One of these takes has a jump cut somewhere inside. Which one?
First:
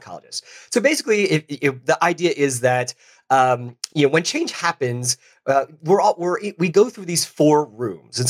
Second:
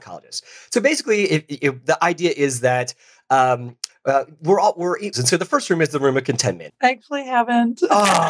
second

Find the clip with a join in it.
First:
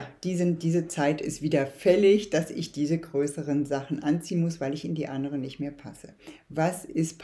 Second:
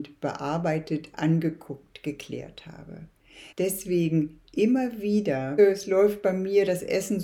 second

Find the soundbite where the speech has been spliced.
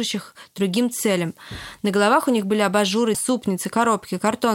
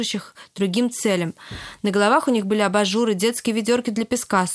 first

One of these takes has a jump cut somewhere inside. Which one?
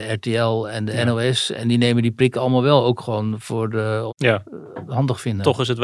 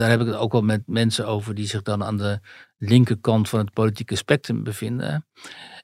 first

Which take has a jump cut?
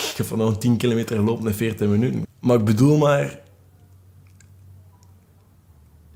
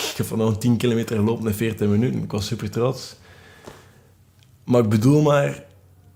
first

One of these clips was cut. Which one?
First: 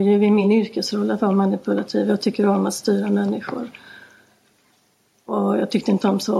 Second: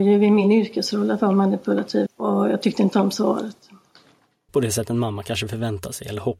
second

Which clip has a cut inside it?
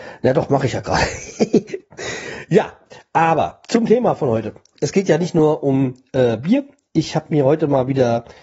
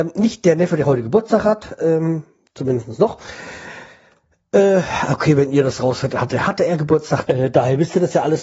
second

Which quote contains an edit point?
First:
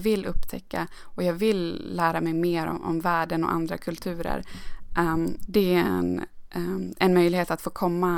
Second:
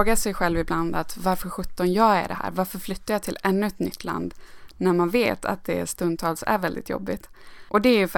first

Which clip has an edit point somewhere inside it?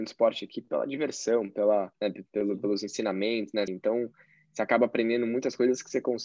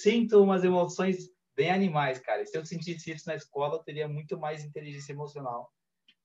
first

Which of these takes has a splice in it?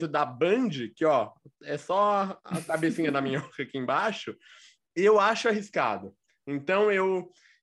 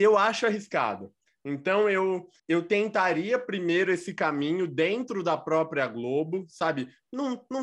second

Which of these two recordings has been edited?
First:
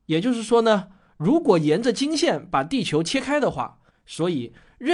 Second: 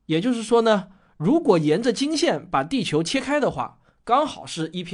first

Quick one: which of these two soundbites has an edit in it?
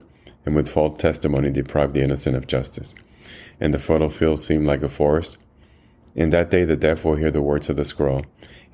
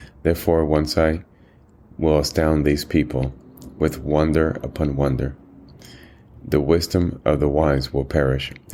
first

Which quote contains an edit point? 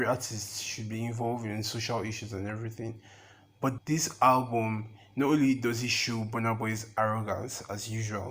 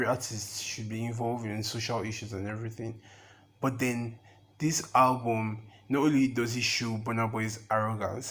first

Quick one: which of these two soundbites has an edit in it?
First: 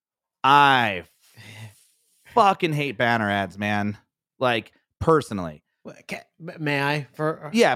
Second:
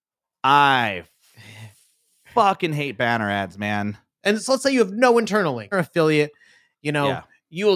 second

